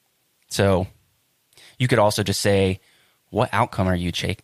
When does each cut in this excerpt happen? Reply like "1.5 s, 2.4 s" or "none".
none